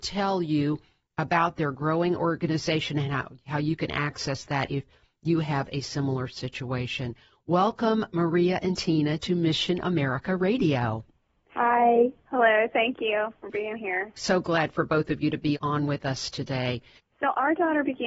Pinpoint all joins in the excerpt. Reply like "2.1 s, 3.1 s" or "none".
14.2 s, 15.5 s, 17.0 s